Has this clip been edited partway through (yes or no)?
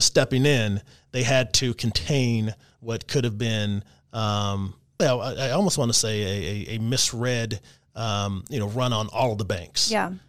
yes